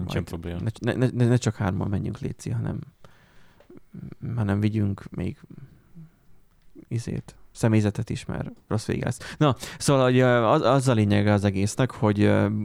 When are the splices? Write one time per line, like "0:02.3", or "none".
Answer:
none